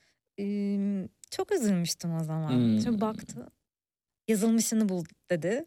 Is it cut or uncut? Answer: cut